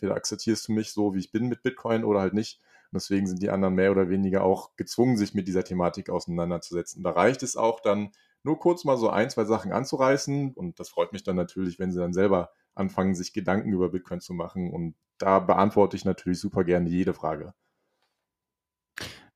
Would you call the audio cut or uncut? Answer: cut